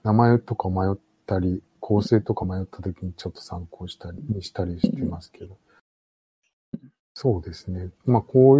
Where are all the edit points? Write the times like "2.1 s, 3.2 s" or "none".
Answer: none

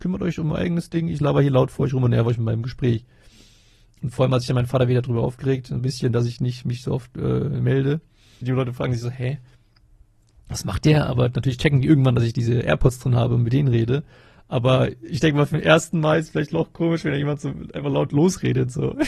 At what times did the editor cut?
8.4 s

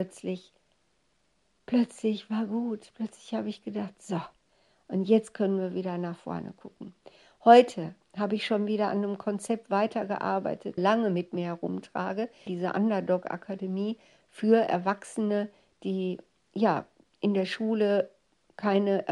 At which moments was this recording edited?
10.8 s, 12.5 s

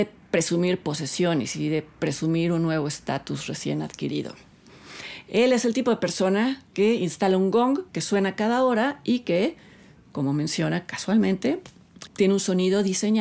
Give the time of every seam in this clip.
5.2 s, 12.1 s

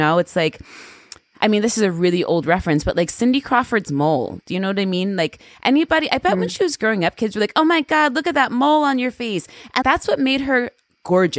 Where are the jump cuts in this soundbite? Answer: 9.8 s

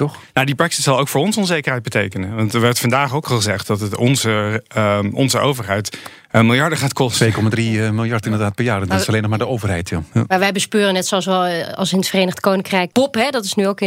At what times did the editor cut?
12.9 s

